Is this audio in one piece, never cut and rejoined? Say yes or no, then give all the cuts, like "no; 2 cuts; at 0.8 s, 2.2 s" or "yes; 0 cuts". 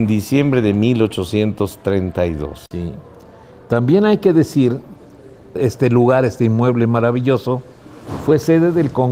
yes; 0 cuts